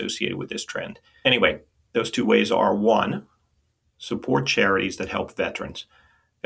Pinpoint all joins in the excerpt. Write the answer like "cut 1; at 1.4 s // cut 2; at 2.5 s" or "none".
cut 1; at 1.2 s